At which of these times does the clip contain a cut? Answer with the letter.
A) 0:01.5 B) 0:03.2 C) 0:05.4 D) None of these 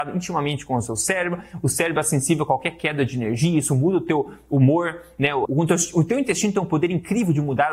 C